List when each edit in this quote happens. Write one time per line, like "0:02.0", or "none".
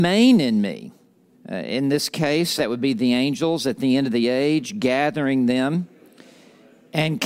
0:01.3
0:02.6